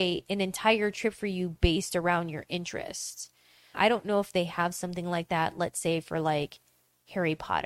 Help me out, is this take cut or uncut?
cut